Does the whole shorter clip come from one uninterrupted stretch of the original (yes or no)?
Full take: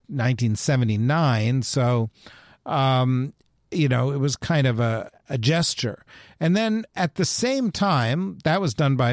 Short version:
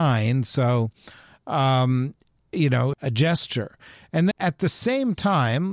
no